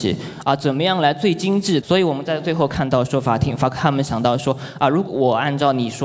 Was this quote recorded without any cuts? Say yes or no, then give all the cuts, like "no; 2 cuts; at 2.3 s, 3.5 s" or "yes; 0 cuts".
no; 2 cuts; at 1.8 s, 5.1 s